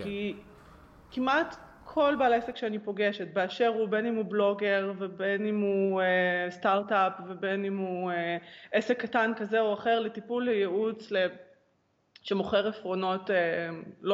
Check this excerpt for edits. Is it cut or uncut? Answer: uncut